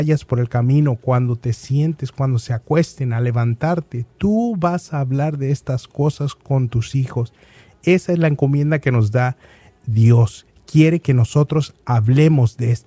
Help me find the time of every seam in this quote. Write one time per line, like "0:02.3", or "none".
none